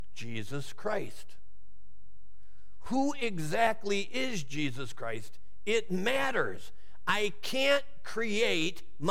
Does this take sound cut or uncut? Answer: uncut